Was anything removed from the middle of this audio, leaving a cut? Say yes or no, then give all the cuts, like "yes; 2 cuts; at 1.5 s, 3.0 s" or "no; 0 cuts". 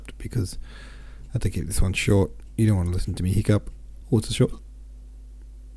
yes; 1 cut; at 4.0 s